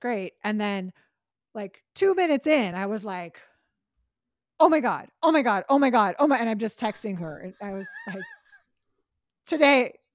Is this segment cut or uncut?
uncut